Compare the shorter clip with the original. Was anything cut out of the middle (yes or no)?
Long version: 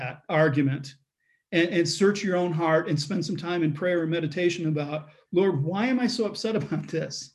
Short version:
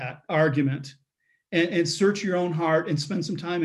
no